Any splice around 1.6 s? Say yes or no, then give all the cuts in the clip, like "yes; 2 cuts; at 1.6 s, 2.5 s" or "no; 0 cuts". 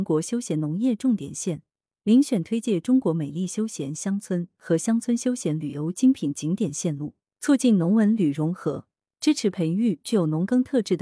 no; 0 cuts